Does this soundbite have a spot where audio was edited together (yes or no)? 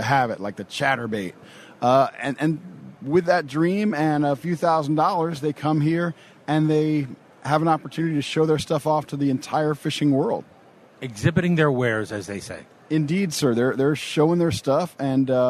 no